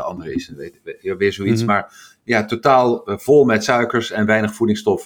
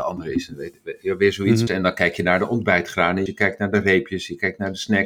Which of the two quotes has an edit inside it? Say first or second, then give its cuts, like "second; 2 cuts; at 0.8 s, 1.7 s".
second; 2 cuts; at 1.7 s, 3.3 s